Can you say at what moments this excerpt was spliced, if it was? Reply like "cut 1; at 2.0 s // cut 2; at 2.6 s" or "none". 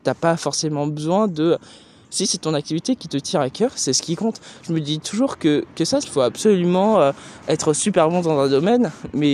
cut 1; at 6.0 s

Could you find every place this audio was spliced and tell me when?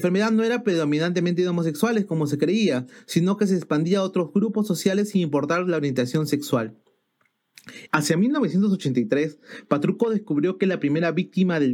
cut 1; at 7.9 s

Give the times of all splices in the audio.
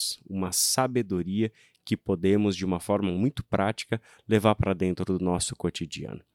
none

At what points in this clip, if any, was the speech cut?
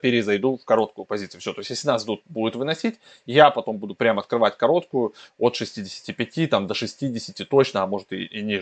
cut 1; at 2.2 s

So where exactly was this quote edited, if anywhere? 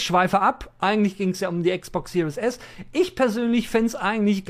none

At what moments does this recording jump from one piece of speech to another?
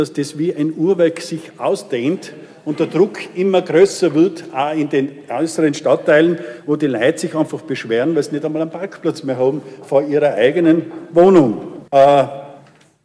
cut 1; at 11.9 s

